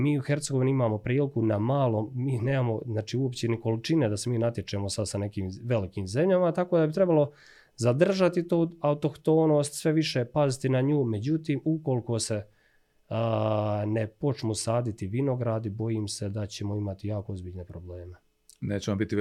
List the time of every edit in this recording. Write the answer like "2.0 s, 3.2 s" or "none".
none